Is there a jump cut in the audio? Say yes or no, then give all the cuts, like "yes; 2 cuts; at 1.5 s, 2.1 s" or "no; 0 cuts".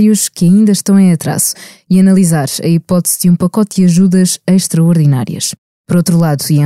yes; 1 cut; at 5.7 s